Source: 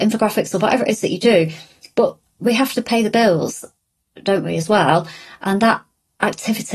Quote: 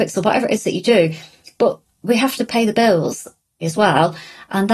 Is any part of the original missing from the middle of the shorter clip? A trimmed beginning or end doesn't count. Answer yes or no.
yes